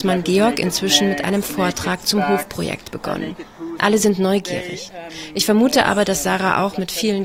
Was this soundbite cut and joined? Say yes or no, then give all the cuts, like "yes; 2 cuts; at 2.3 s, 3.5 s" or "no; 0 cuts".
yes; 1 cut; at 3.8 s